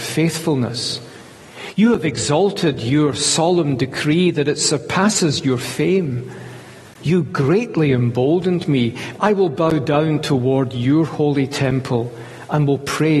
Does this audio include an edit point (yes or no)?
yes